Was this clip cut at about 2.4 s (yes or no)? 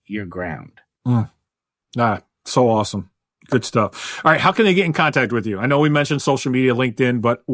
no